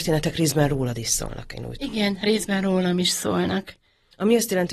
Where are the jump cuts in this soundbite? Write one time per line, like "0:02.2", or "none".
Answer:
none